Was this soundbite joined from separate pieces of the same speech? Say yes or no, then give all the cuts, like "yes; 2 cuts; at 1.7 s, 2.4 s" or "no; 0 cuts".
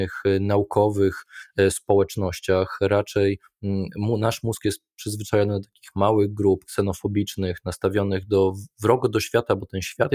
no; 0 cuts